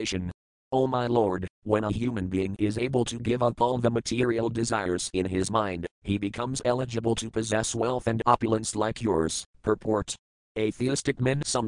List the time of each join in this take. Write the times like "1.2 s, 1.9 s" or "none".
9.5 s